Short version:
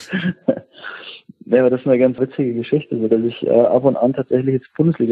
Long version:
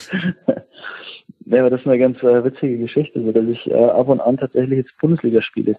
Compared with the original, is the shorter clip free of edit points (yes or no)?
no